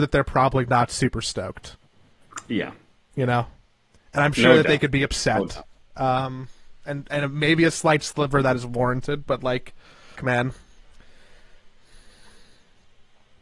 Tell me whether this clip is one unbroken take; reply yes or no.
no